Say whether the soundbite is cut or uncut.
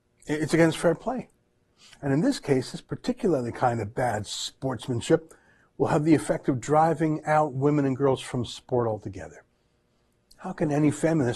uncut